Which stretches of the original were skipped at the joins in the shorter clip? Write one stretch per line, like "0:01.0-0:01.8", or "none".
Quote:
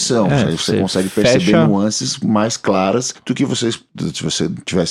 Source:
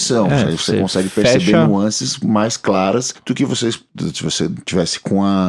none